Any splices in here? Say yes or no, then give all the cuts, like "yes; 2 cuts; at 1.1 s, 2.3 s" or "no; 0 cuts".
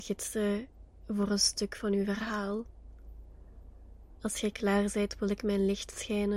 no; 0 cuts